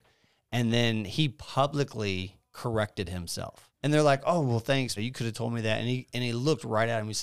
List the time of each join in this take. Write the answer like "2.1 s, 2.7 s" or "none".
3.7 s, 5.0 s